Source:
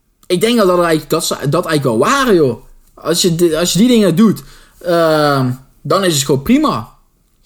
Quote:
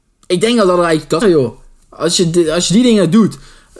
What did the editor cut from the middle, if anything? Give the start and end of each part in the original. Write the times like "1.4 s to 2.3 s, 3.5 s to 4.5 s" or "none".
1.2 s to 2.3 s